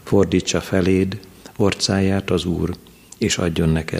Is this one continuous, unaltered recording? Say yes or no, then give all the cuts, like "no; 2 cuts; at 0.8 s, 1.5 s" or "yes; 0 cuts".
yes; 0 cuts